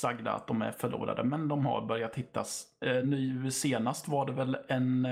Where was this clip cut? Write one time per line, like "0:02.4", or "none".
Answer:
none